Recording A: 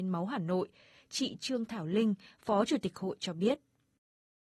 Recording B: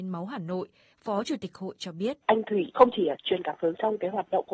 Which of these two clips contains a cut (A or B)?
B